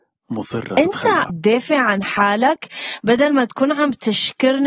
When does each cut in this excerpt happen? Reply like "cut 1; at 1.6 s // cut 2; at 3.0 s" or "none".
cut 1; at 1.3 s